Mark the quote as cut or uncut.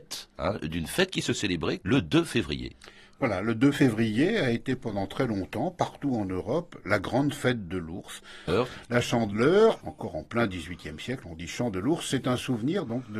cut